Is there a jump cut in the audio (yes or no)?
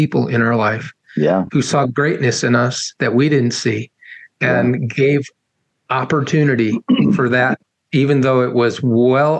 no